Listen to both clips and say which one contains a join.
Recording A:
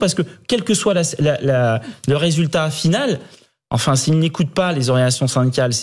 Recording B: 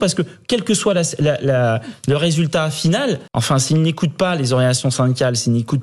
B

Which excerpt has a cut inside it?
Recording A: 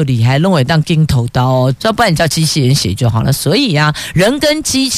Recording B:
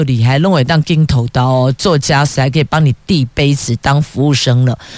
A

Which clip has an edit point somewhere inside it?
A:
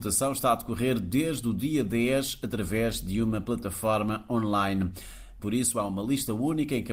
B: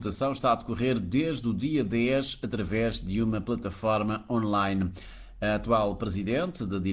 A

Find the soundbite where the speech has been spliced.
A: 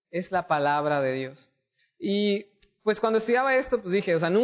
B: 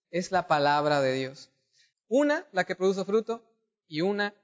B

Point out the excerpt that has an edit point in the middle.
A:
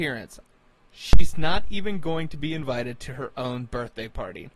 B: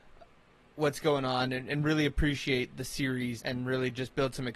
B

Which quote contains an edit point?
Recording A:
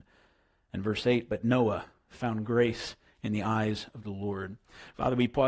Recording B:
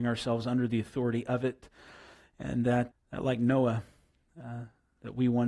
B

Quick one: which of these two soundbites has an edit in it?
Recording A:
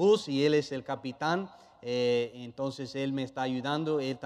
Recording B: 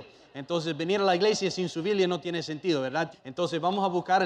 B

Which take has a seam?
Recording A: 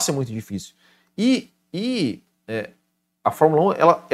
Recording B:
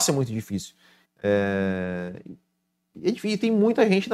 B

